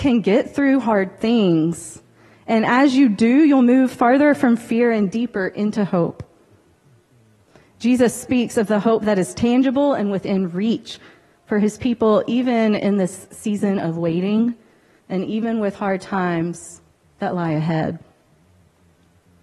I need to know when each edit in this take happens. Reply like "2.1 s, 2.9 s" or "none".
none